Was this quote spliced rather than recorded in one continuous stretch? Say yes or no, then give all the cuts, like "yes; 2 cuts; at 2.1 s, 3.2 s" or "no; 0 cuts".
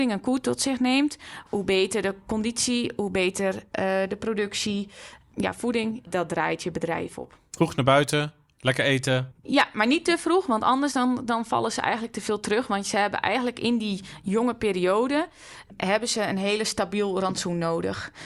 no; 0 cuts